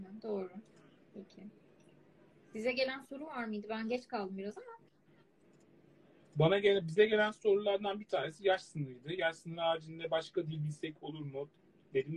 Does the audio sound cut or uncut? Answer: uncut